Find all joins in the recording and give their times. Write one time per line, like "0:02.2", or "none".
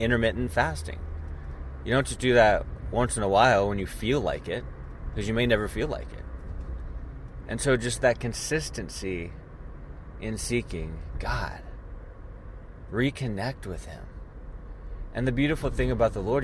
0:07.4